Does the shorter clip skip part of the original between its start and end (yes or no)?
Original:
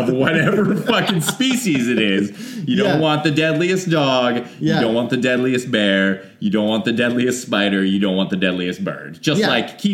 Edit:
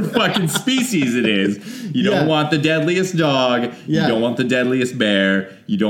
no